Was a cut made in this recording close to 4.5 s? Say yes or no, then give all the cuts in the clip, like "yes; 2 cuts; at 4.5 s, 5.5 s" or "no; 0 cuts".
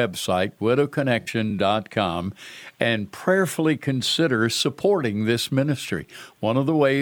no; 0 cuts